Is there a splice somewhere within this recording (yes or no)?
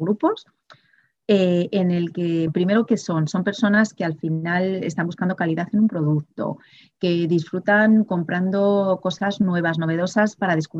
yes